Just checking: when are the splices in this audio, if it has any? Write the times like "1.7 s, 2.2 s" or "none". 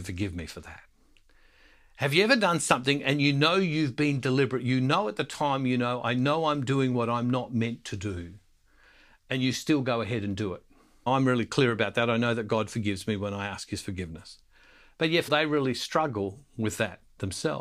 11.1 s, 15.3 s